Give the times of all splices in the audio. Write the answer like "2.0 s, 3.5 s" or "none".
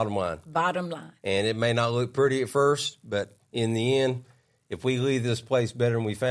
none